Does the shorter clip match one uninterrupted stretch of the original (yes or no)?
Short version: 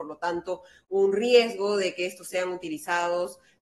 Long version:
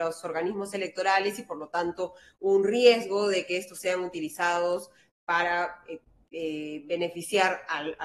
yes